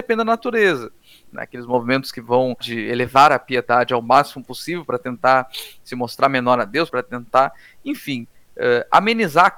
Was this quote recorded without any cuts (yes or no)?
no